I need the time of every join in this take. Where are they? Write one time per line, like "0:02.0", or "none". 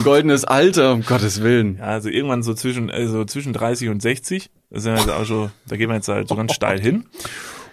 none